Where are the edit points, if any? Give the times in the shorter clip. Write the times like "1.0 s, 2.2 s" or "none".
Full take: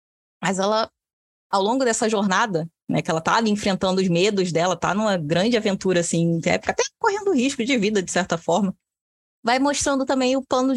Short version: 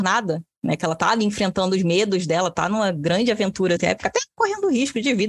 3.8 s